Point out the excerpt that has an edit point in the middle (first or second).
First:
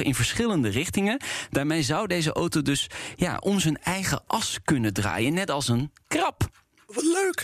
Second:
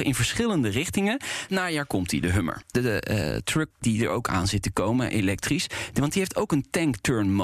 second